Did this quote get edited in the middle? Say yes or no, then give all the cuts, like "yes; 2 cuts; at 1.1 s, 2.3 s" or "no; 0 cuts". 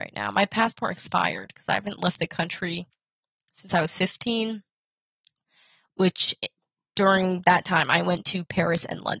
no; 0 cuts